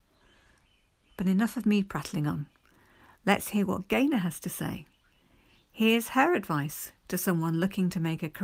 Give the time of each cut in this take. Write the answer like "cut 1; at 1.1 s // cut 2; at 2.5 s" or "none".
none